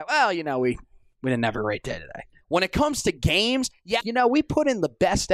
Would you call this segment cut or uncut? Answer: cut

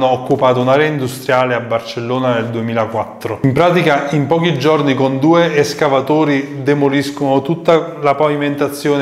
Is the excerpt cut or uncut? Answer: uncut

